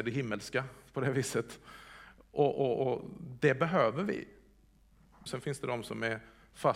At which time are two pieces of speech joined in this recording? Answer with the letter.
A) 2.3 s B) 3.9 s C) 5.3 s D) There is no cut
C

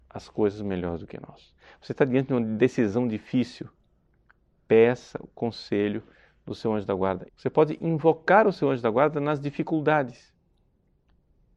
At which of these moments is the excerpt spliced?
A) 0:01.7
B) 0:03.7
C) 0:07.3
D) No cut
C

